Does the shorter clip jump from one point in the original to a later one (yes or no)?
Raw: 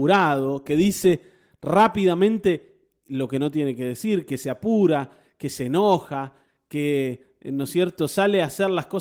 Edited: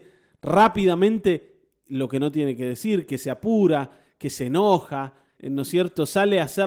yes